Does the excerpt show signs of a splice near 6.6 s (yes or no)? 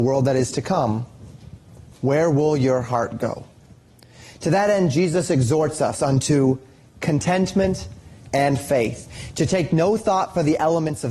no